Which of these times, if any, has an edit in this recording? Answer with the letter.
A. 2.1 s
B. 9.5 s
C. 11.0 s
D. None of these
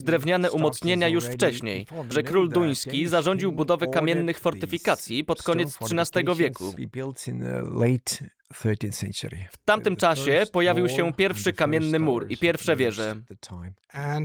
A